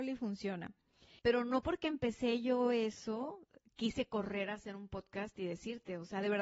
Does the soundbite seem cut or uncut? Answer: cut